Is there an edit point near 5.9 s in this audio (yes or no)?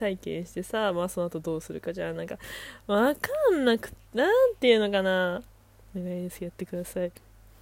yes